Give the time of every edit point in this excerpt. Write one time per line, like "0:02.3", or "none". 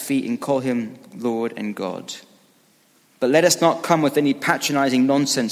none